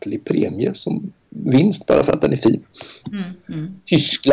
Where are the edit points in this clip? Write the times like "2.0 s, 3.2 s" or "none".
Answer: 3.0 s